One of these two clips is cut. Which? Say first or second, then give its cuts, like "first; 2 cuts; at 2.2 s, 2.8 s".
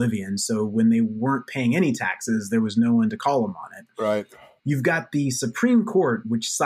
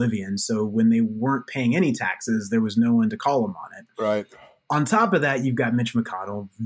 first; 1 cut; at 4.6 s